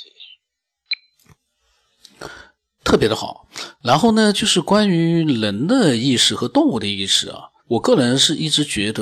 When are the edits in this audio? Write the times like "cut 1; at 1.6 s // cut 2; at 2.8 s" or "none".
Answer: cut 1; at 2.8 s // cut 2; at 7.6 s